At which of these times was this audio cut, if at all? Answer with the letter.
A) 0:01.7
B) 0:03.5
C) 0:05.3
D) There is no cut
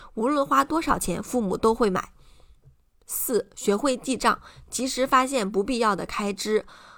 D